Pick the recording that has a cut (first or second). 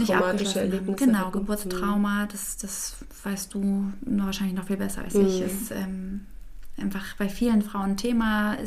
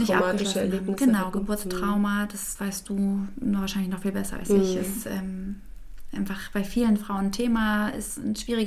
second